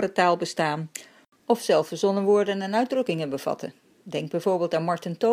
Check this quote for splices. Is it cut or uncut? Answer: uncut